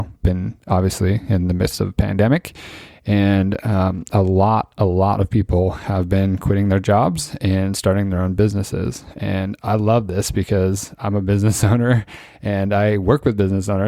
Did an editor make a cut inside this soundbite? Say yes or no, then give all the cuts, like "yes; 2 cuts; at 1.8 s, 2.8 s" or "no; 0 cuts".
no; 0 cuts